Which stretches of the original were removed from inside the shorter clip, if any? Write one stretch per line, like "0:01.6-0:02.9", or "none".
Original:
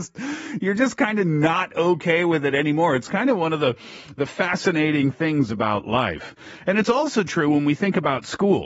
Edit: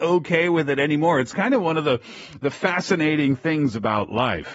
none